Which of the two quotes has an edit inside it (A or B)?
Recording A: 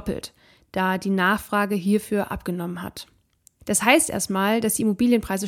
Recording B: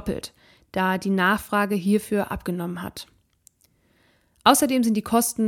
A